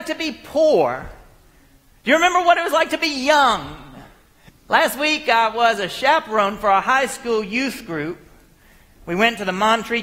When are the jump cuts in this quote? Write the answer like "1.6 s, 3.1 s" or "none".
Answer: 4.5 s